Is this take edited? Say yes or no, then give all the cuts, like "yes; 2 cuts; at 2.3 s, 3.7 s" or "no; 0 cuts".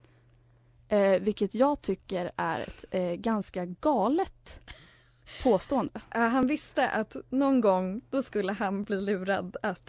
no; 0 cuts